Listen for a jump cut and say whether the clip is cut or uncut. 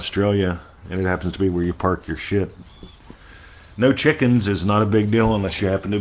uncut